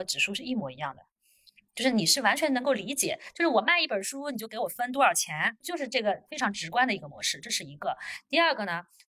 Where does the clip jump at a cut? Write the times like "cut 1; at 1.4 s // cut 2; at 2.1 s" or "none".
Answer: none